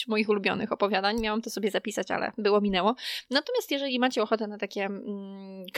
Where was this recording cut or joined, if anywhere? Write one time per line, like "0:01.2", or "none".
none